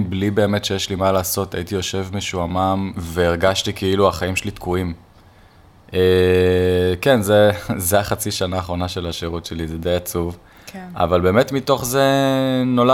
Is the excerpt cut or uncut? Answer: uncut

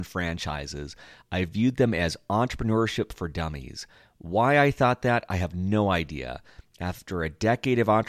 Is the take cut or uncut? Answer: uncut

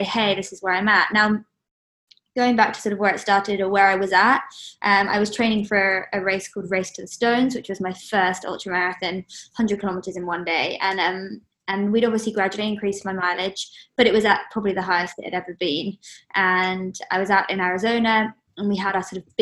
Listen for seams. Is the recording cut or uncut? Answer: uncut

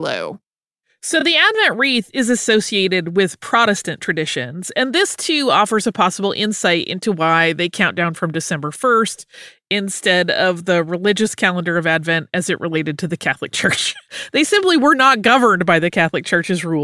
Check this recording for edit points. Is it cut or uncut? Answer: uncut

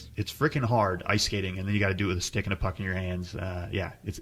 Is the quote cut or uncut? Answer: uncut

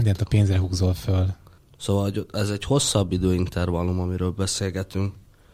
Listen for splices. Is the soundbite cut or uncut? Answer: cut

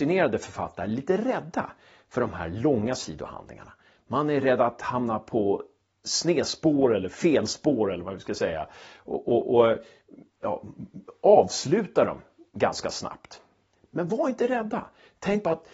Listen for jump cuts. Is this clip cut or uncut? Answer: uncut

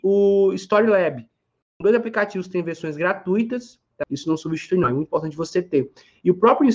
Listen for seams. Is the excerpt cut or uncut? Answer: cut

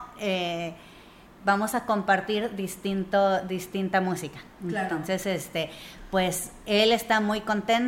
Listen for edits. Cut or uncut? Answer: uncut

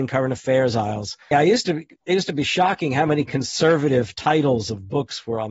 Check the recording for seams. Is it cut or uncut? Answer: cut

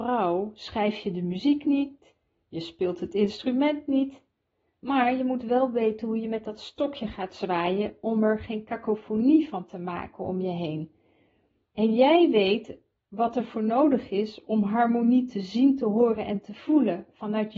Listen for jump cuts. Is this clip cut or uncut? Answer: uncut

